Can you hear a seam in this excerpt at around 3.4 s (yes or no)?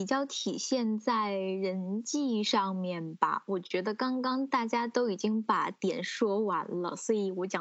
no